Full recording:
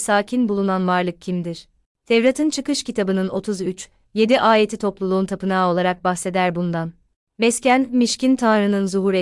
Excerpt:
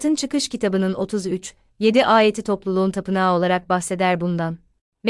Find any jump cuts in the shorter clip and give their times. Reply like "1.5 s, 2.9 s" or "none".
none